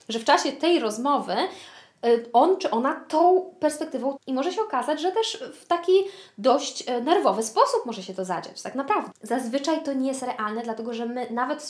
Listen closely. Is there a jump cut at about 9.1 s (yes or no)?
yes